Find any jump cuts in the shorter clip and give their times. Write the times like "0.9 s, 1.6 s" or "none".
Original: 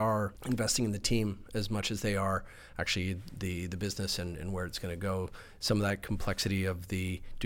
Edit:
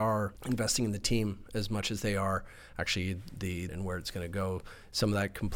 3.7 s